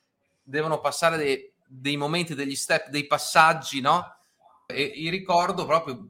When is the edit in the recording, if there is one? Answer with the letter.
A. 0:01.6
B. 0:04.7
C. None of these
B